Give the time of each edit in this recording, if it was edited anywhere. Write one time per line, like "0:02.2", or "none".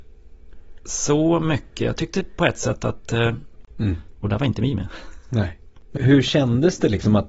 0:03.7
0:06.0